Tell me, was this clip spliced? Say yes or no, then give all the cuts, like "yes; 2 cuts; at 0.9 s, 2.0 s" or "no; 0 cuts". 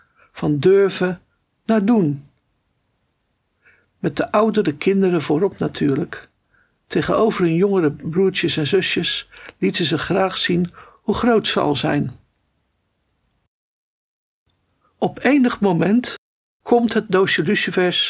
yes; 1 cut; at 16.6 s